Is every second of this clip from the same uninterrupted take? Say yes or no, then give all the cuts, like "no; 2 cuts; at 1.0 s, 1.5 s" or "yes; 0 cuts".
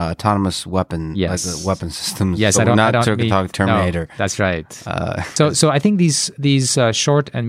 yes; 0 cuts